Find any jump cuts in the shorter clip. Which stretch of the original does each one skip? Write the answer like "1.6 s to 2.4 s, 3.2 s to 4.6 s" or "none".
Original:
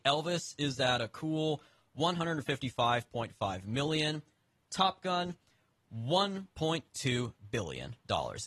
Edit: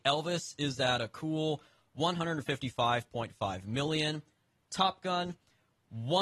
none